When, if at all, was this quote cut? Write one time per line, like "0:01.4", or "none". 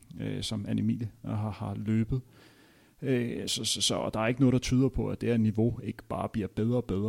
none